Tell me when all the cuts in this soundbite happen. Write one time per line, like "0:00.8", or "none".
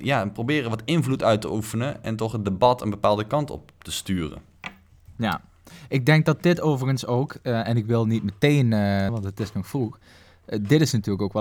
0:09.1